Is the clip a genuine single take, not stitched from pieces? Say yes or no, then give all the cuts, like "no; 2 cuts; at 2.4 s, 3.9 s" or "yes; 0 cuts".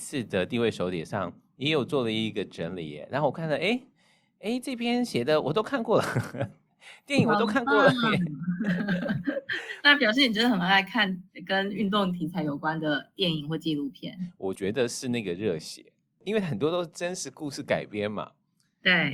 yes; 0 cuts